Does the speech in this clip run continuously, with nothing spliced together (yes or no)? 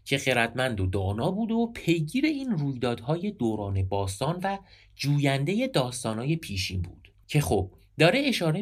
no